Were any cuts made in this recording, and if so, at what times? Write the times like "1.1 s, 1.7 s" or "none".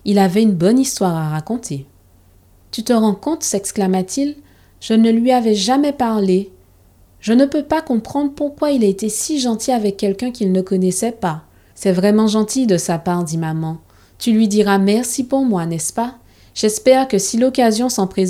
11.7 s